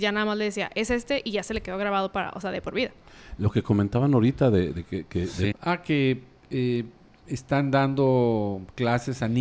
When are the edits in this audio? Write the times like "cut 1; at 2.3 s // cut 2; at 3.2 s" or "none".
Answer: cut 1; at 5.5 s

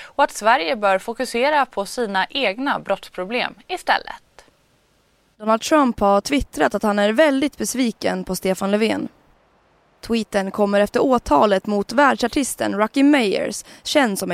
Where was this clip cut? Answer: none

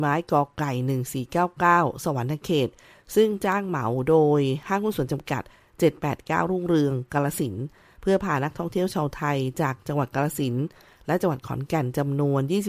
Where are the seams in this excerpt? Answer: none

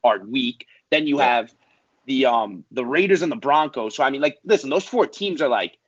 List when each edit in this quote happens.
none

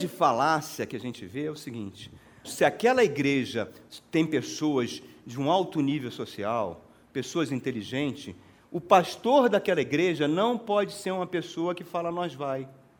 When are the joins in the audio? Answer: cut 1; at 2.4 s

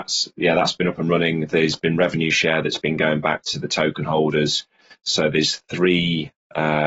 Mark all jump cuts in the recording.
none

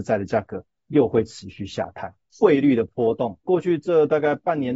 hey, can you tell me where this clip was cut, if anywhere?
cut 1; at 2.2 s // cut 2; at 3.5 s

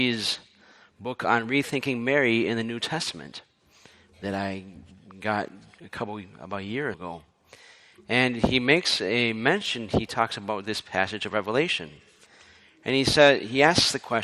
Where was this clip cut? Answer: cut 1; at 6.9 s

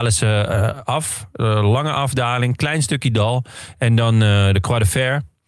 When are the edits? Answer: none

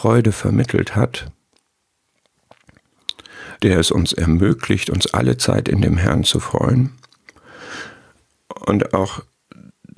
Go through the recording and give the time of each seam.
cut 1; at 3.6 s

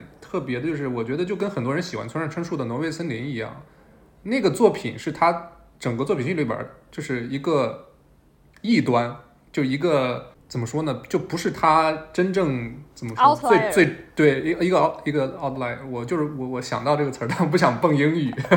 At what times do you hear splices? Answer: none

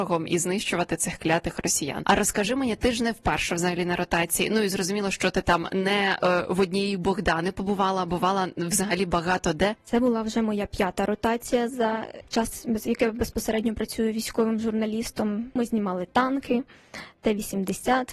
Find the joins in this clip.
cut 1; at 9.8 s

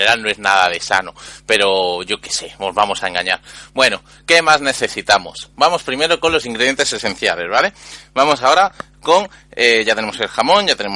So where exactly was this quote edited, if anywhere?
none

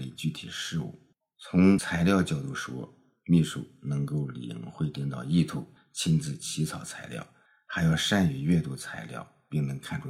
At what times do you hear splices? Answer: none

